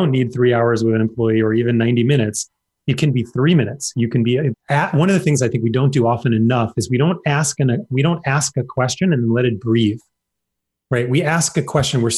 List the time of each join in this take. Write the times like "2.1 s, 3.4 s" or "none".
4.5 s